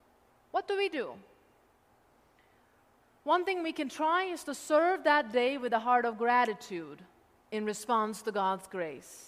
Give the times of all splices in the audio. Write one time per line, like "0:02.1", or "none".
none